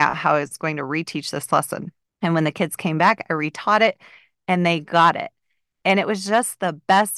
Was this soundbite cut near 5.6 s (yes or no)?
no